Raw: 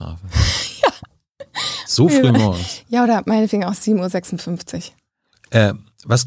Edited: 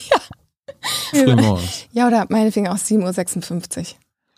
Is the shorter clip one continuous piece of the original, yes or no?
no